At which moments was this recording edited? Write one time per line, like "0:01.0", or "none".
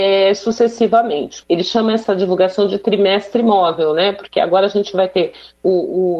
0:01.4